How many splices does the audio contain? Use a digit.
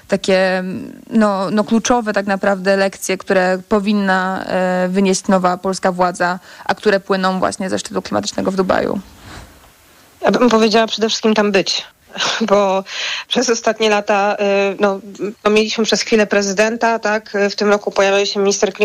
0